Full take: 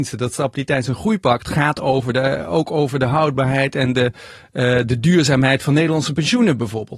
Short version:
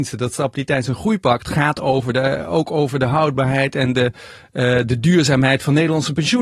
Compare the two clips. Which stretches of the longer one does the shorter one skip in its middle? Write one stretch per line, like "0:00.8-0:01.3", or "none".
none

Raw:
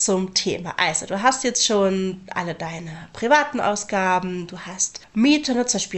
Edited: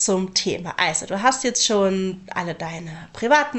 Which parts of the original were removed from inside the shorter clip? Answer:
none

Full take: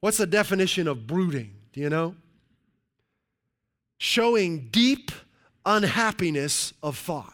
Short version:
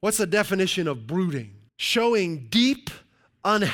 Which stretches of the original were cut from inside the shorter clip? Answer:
0:01.7-0:03.9

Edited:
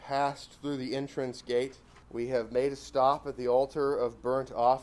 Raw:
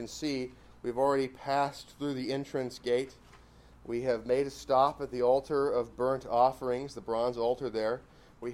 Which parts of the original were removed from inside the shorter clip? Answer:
0:03.4-0:03.8

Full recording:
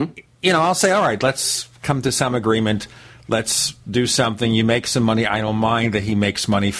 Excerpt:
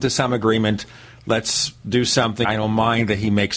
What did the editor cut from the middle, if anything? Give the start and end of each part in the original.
0:04.5-0:05.3

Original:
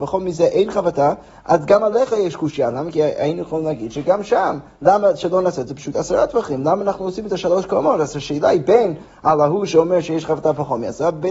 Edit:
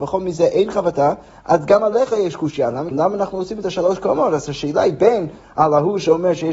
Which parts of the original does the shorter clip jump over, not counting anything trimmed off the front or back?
0:02.9-0:06.6

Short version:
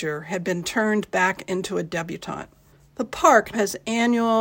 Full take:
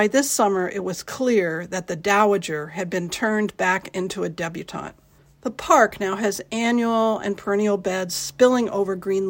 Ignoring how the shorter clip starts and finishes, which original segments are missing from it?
0:06.0-0:06.2

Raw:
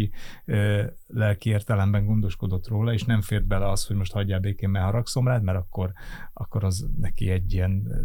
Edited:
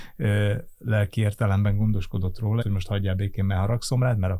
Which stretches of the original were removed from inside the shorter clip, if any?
0:02.9-0:03.9

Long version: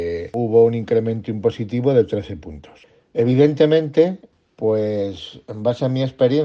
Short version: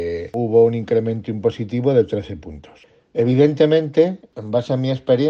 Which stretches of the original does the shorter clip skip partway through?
0:04.3-0:05.5

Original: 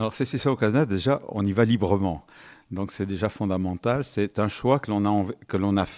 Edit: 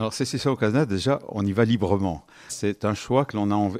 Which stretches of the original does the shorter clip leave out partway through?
0:02.5-0:04.0

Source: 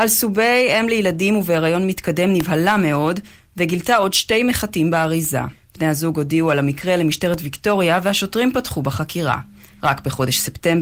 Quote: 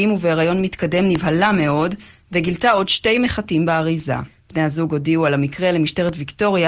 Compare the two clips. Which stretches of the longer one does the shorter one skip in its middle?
none

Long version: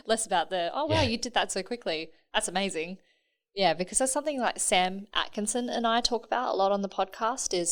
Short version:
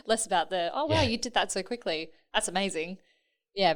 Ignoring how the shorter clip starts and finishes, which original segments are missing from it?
none

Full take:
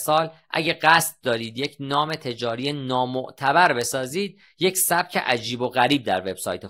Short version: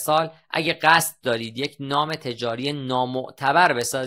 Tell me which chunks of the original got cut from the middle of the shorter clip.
none

